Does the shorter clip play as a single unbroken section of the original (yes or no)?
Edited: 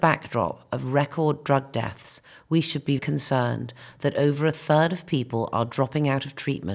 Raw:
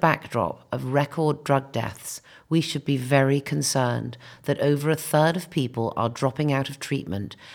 no